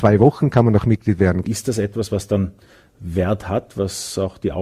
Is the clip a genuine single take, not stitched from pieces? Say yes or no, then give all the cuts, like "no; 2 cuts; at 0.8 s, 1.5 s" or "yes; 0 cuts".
no; 1 cut; at 1.4 s